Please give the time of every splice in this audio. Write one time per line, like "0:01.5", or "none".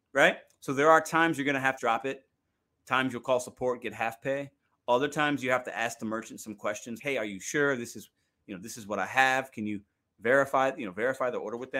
0:01.8
0:07.0